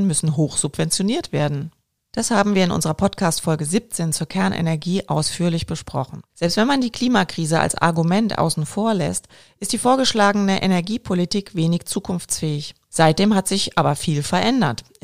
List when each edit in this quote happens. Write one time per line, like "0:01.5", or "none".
0:06.3
0:12.9